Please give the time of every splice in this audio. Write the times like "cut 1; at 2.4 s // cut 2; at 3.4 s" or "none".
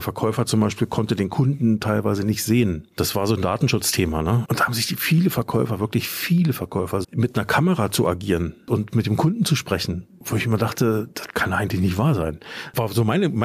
cut 1; at 4.4 s // cut 2; at 7.0 s